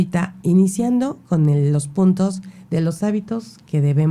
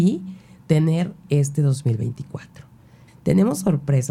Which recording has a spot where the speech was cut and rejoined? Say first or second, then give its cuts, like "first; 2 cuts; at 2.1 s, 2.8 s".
second; 1 cut; at 3.1 s